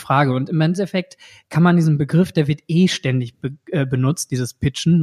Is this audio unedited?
yes; 0 cuts

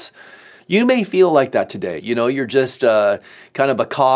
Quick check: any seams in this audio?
yes; 1 cut; at 2.0 s

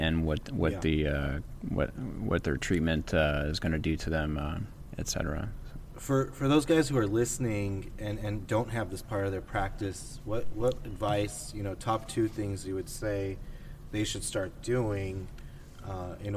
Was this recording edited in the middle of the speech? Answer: no; 0 cuts

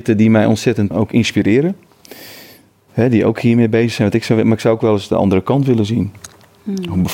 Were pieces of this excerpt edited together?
yes; 1 cut; at 0.9 s

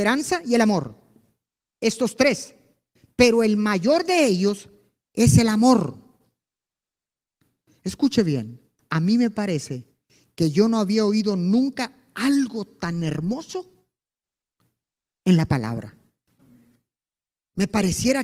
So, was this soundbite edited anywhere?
no; 0 cuts

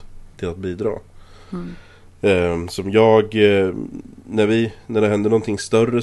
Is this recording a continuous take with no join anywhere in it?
yes; 0 cuts

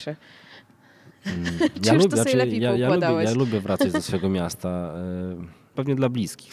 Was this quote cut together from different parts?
no; 0 cuts

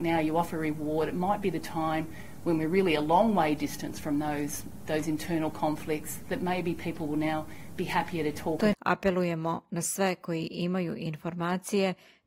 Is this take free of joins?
no; 1 cut; at 8.7 s

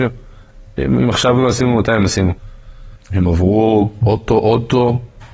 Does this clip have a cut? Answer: yes; 1 cut; at 3.0 s

